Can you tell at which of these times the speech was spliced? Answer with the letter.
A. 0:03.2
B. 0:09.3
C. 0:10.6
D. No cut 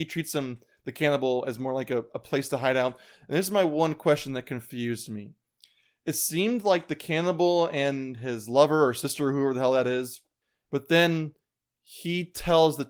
C